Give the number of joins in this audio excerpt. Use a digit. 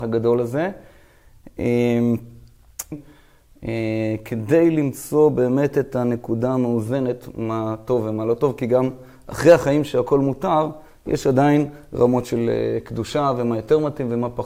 1